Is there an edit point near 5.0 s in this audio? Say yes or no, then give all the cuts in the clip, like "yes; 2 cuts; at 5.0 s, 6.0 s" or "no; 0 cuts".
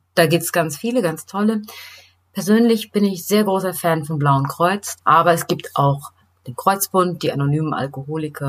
yes; 1 cut; at 5.0 s